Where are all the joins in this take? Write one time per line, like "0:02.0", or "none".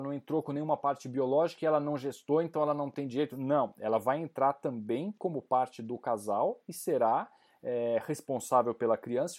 none